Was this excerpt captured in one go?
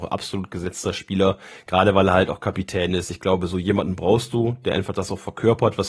yes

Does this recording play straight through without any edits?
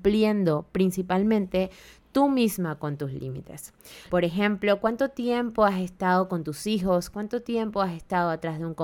no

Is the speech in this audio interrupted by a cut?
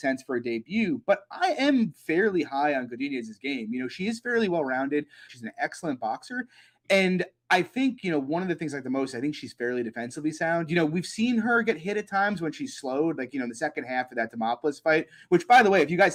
yes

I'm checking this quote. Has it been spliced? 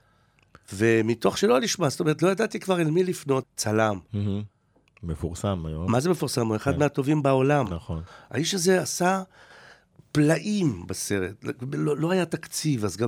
yes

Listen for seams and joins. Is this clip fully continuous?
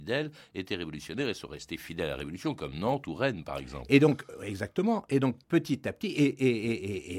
no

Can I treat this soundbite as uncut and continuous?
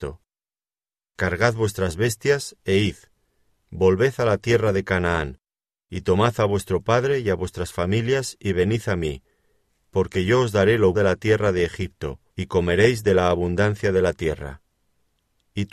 no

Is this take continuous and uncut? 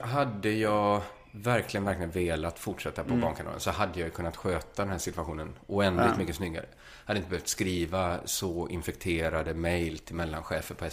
yes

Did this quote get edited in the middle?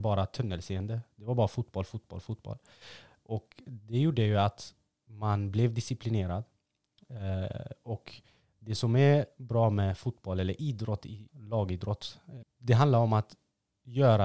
yes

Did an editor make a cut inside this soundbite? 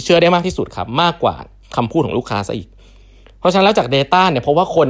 no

